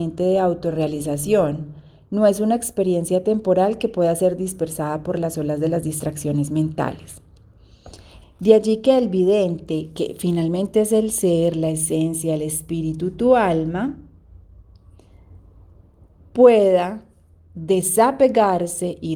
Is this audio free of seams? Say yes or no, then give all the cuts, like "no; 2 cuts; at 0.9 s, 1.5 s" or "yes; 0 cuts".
no; 1 cut; at 8.2 s